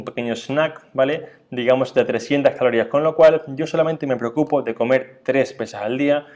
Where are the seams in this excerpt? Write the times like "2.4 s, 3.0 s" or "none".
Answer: none